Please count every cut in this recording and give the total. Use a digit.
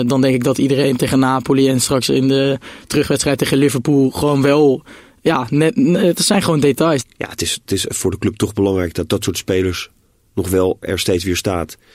2